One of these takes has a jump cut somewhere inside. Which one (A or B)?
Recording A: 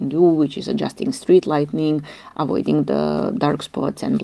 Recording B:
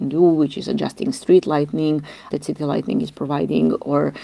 B